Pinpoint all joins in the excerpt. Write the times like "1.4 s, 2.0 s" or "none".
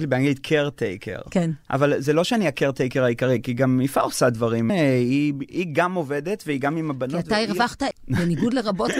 4.7 s, 7.9 s